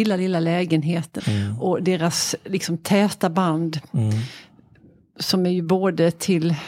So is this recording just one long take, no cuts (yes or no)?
no